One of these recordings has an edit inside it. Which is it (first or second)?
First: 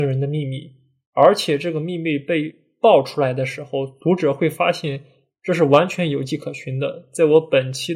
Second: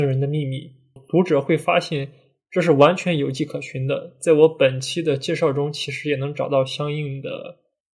second